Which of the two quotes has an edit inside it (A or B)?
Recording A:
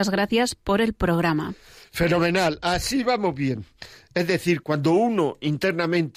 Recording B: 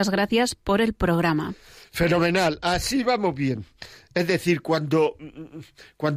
A